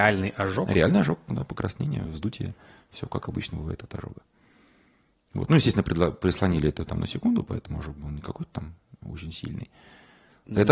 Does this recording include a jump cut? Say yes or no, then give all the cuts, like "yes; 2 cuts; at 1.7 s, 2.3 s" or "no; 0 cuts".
no; 0 cuts